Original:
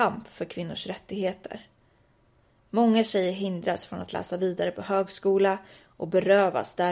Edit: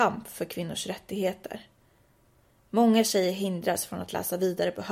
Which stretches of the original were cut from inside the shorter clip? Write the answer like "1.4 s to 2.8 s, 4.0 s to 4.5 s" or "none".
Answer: none